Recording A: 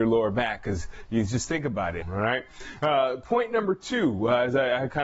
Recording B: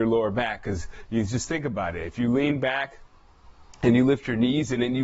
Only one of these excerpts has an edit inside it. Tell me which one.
A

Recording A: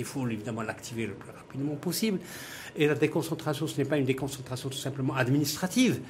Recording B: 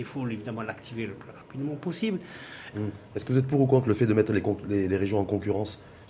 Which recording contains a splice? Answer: B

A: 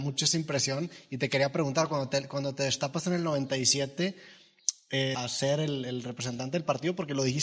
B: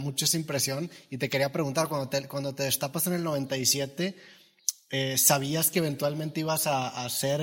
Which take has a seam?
A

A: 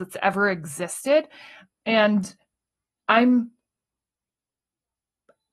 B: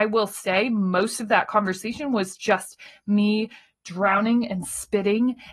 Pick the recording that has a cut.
A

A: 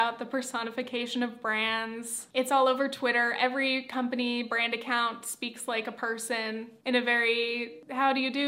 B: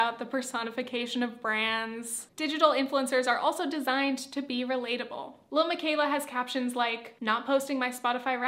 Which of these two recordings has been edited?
B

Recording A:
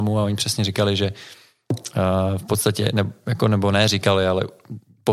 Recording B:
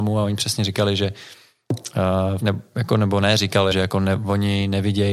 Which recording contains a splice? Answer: B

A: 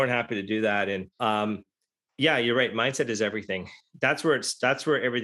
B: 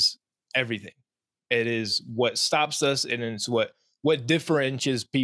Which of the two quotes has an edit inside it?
A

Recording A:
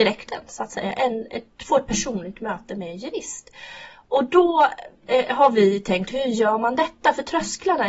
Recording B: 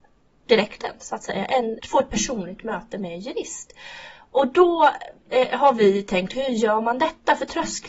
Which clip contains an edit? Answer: B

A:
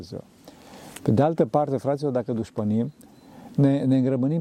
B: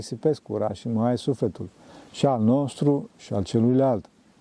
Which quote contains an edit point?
A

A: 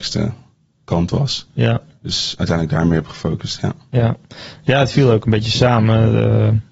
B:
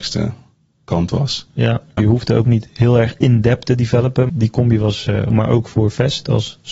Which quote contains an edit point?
B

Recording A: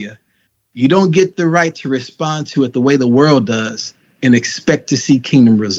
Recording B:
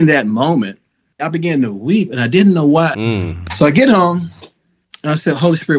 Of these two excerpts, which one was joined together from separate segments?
B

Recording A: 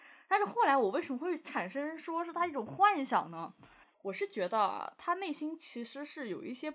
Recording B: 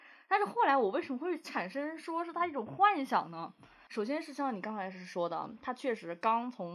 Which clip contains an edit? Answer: A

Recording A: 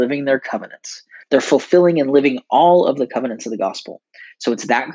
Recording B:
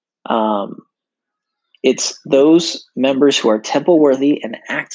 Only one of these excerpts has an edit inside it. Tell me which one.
A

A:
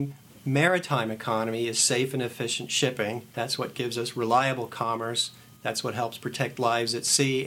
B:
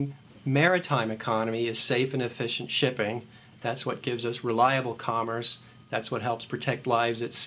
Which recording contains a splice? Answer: A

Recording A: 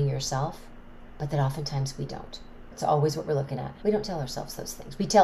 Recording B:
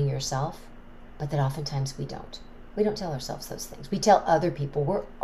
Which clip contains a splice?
A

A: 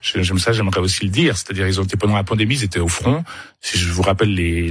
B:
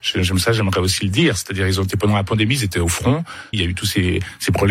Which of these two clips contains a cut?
B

